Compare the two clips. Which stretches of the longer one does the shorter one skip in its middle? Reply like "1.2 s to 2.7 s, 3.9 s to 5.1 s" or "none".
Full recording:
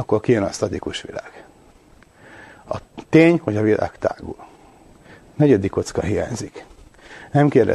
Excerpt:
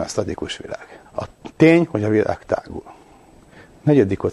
1.5 s to 2.6 s